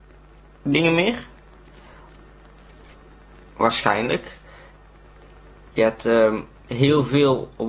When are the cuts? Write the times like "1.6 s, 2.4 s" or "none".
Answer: 5.7 s